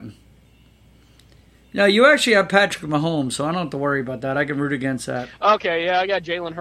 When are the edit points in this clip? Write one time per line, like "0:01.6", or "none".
none